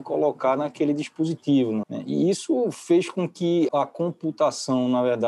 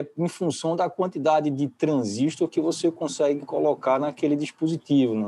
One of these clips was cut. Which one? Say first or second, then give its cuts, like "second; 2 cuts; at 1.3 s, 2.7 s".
first; 2 cuts; at 1.8 s, 3.7 s